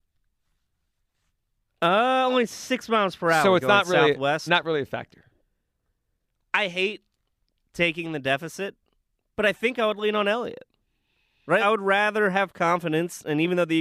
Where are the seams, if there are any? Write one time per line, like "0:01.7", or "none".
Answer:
0:11.6